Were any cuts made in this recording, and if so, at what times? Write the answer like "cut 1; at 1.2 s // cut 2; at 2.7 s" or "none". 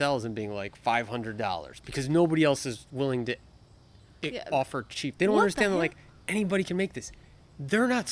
cut 1; at 5.1 s